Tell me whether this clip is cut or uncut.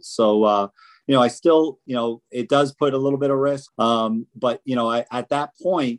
cut